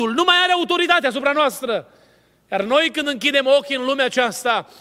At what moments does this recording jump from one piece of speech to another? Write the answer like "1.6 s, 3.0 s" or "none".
none